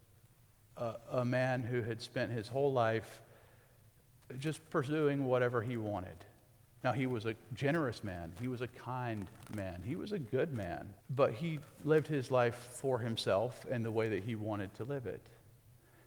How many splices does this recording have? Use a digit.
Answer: 1